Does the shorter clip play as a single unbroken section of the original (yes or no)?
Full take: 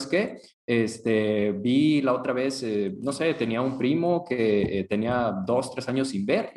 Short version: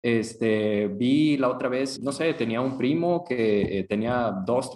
no